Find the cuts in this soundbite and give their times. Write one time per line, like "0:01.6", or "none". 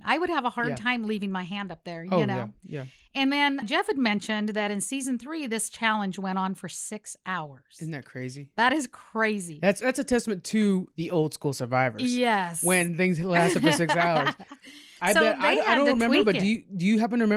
0:03.6
0:09.8